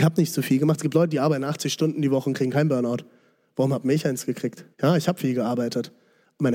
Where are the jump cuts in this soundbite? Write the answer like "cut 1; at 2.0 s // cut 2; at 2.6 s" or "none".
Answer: cut 1; at 4.7 s

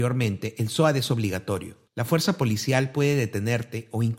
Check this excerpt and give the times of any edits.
cut 1; at 1.9 s

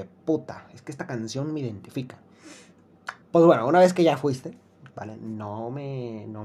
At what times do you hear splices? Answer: cut 1; at 3.2 s // cut 2; at 4.9 s

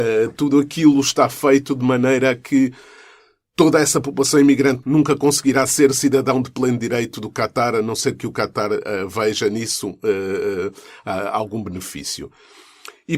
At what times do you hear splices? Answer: cut 1; at 4.8 s

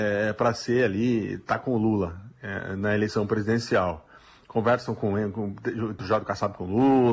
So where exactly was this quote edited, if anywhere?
cut 1; at 6.0 s

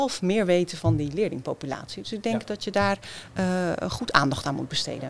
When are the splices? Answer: none

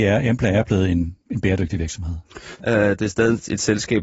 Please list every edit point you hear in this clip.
cut 1; at 1.2 s // cut 2; at 2.6 s

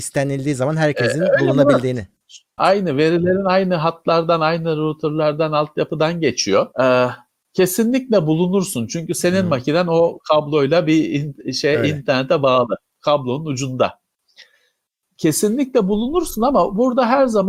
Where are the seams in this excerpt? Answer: cut 1; at 2.6 s // cut 2; at 6.7 s

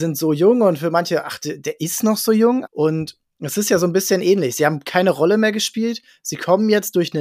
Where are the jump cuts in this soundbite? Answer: cut 1; at 2.7 s

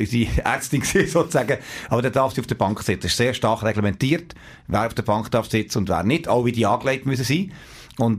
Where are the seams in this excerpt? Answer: none

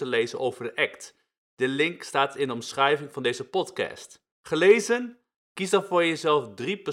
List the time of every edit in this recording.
cut 1; at 4.3 s

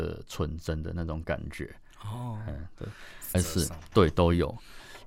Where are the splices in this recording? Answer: cut 1; at 3.3 s

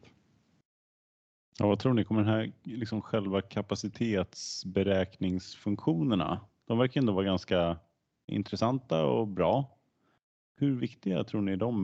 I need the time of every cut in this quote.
cut 1; at 8.3 s

